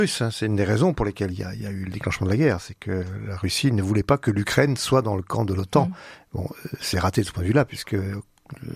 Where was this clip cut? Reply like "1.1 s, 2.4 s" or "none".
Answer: none